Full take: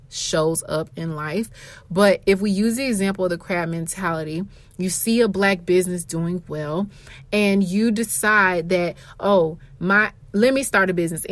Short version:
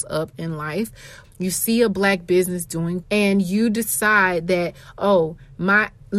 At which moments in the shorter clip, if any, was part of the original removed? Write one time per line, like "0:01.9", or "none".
0:01.2
0:03.0